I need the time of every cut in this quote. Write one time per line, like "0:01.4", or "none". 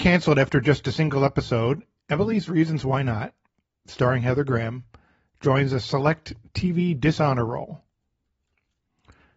none